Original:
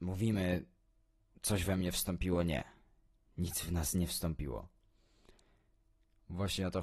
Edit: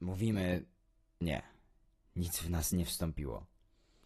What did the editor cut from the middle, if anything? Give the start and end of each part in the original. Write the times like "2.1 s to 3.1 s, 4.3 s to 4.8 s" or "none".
1.2 s to 2.4 s